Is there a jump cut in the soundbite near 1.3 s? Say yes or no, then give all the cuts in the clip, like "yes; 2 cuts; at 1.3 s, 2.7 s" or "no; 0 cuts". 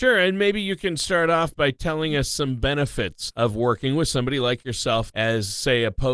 no; 2 cuts; at 3.3 s, 5.1 s